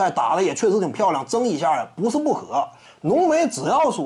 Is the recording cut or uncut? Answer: cut